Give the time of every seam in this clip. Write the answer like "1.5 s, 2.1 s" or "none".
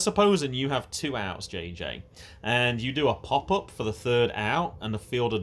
none